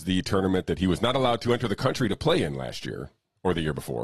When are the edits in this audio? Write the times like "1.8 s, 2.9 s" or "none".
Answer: none